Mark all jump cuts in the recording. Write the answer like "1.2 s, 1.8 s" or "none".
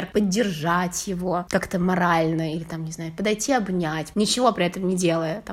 4.1 s